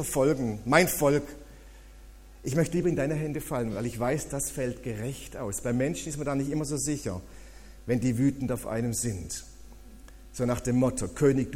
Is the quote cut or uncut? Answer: uncut